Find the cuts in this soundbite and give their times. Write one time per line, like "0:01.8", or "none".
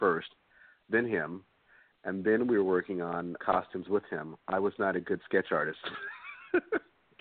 0:03.4